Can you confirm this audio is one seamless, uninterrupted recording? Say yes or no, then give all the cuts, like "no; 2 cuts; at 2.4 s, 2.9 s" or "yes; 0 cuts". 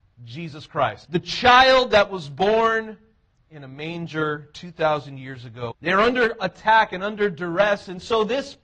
no; 2 cuts; at 1.0 s, 5.7 s